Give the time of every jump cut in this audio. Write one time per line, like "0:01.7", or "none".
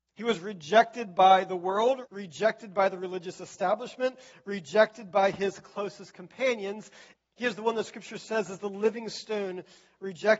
0:02.1
0:07.2

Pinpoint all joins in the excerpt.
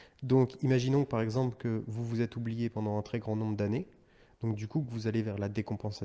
none

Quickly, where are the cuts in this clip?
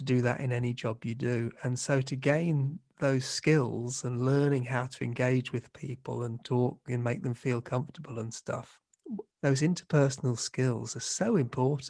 0:09.3

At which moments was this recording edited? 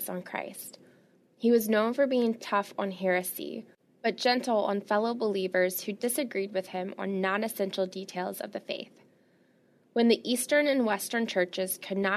0:02.4

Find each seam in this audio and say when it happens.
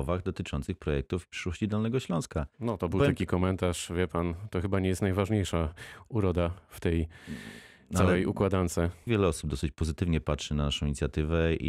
0:02.5
0:09.1

